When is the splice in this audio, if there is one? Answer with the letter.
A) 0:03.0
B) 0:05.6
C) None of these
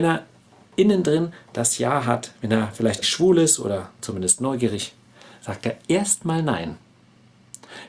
A